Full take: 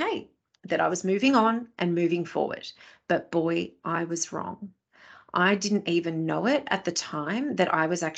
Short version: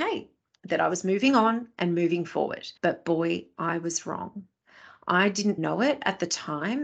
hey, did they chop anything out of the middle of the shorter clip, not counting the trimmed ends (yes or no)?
yes